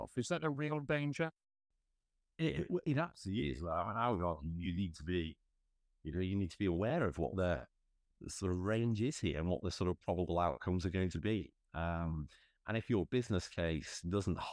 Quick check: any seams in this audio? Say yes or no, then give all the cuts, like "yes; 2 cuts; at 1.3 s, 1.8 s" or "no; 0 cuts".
no; 0 cuts